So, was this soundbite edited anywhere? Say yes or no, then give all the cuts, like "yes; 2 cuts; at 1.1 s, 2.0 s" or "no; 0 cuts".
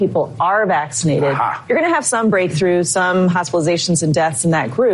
no; 0 cuts